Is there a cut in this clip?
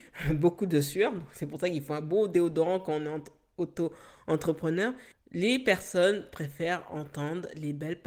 yes; 1 cut; at 5.1 s

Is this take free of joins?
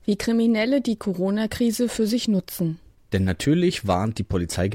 yes; 0 cuts

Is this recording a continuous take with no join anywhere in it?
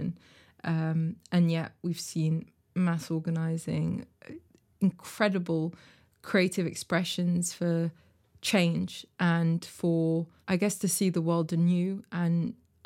yes; 0 cuts

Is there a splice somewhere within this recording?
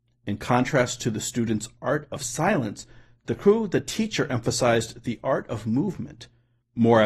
no; 0 cuts

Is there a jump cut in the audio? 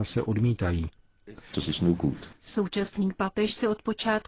yes; 1 cut; at 1.5 s

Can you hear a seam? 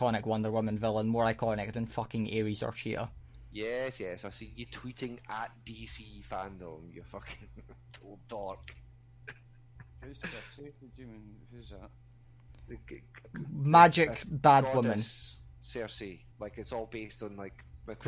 yes; 1 cut; at 16.3 s

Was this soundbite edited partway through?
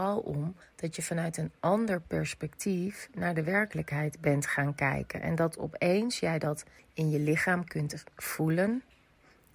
no; 0 cuts

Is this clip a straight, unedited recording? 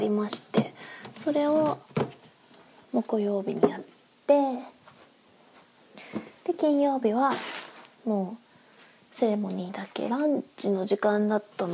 no; 1 cut; at 10.1 s

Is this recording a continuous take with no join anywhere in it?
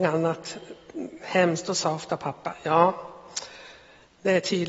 yes; 0 cuts

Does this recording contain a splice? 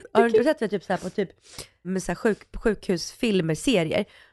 yes; 1 cut; at 1.8 s

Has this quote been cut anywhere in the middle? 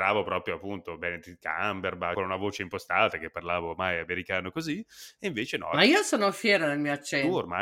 yes; 1 cut; at 2.1 s

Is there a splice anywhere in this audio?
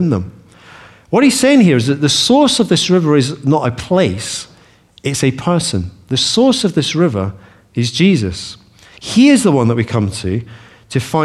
no; 0 cuts

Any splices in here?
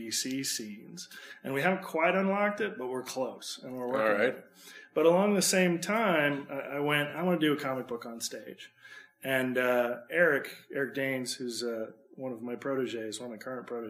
no; 0 cuts

